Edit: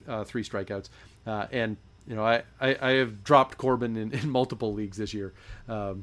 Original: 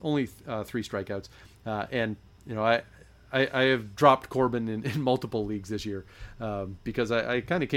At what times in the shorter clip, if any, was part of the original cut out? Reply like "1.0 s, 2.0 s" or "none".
2.5 s

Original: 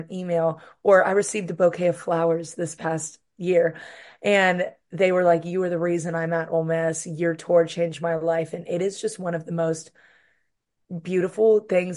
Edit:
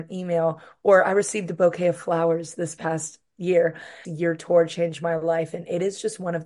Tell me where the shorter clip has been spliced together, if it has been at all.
4.0 s

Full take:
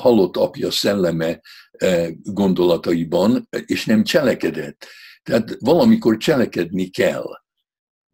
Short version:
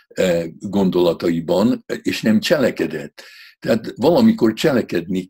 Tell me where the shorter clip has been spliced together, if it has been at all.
none

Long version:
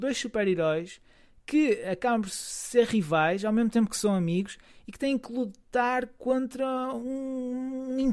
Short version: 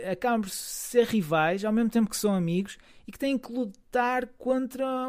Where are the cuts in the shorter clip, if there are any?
none

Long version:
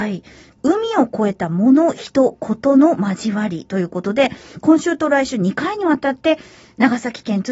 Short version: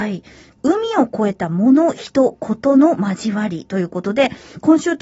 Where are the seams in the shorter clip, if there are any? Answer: none

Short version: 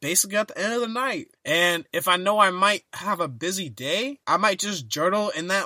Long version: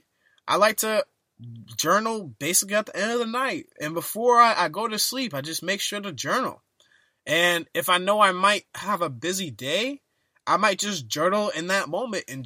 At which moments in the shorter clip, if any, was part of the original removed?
1.3 s, 4.2 s

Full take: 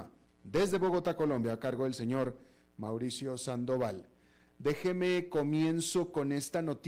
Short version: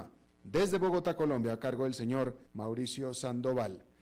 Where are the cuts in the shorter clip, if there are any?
2.5 s

